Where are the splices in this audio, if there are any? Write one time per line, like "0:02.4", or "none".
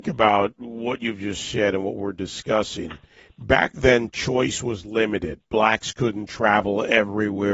none